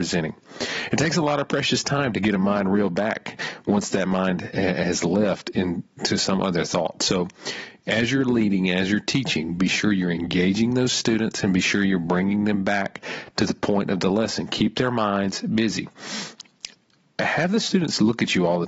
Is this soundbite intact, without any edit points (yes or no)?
yes